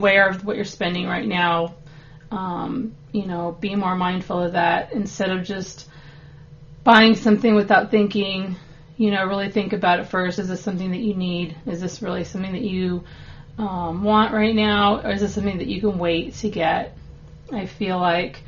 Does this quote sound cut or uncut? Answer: uncut